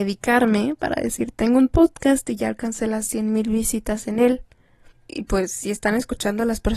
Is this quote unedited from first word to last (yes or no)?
no